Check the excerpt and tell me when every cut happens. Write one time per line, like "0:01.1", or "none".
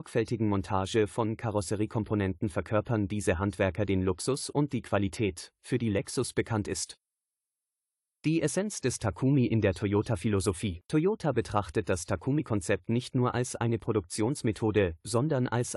0:10.8